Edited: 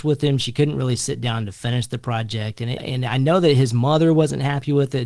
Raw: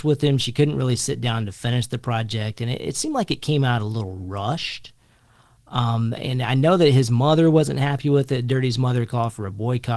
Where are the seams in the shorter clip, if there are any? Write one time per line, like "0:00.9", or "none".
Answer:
0:02.8